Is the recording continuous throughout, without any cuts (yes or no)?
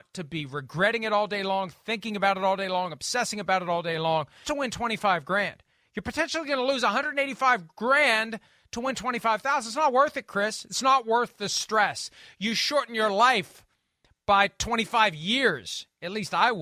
no